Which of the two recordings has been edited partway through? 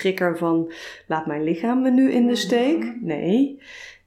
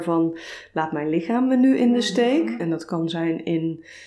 second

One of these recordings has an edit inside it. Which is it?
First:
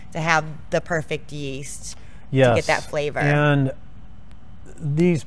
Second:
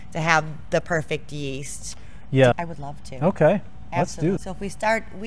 second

